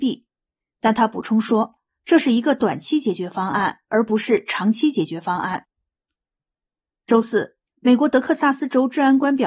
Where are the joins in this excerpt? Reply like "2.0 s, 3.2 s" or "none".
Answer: none